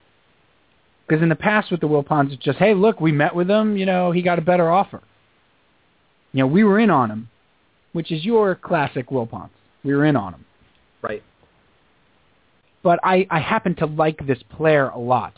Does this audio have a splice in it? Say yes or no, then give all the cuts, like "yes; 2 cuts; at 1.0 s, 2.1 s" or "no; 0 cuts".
no; 0 cuts